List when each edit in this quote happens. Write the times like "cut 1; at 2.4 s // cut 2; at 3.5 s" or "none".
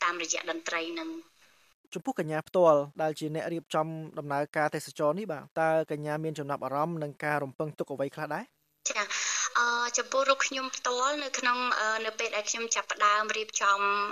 cut 1; at 2.9 s // cut 2; at 5.5 s